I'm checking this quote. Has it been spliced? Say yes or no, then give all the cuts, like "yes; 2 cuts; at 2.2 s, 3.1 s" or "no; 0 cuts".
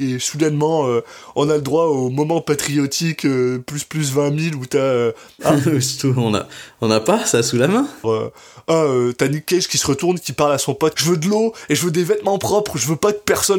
yes; 3 cuts; at 5.4 s, 8.0 s, 10.9 s